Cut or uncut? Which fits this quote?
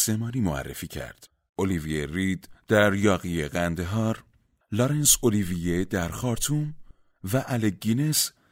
cut